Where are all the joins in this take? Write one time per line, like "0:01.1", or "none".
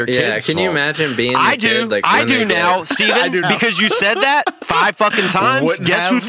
0:03.4
0:04.6